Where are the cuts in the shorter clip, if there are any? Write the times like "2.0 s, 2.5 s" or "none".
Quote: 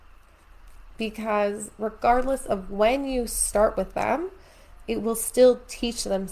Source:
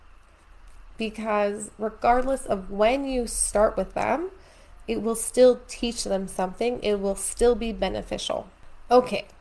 none